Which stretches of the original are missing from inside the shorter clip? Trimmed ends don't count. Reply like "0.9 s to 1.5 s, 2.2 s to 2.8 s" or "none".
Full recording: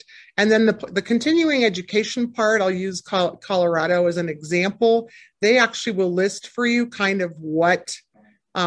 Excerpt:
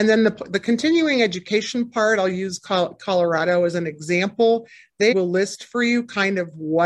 5.5 s to 5.9 s